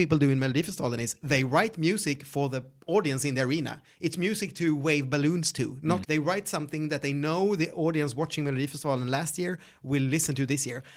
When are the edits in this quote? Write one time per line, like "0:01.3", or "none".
0:06.0